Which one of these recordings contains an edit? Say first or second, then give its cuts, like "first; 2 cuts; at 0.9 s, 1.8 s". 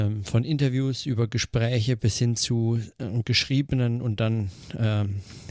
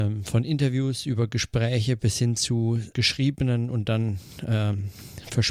second; 1 cut; at 2.9 s